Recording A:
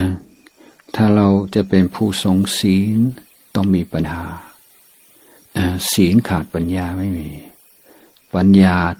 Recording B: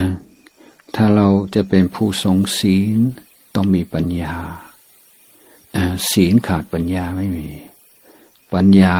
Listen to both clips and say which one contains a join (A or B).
A